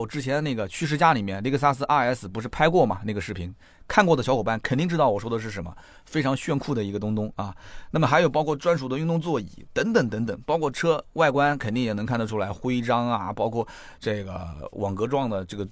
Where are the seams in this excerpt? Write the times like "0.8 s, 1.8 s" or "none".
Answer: none